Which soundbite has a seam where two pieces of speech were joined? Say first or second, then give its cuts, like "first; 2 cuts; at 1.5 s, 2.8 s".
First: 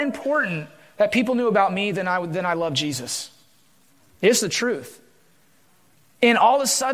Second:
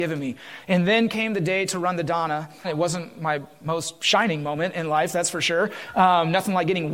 second; 1 cut; at 2.6 s